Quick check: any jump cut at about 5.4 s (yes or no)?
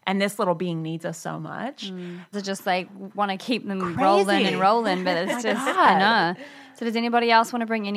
no